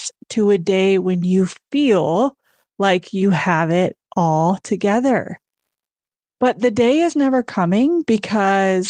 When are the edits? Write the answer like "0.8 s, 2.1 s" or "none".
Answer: none